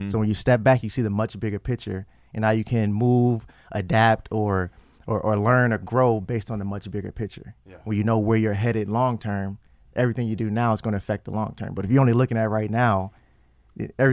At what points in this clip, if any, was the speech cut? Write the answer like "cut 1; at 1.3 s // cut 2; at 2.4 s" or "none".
none